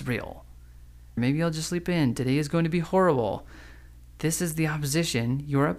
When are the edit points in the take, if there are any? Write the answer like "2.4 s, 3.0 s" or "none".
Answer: 1.2 s